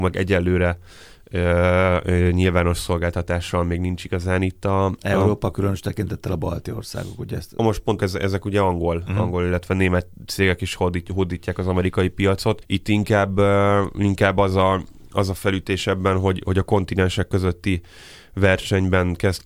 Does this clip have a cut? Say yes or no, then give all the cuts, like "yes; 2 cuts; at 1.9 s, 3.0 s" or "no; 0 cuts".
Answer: yes; 1 cut; at 8.0 s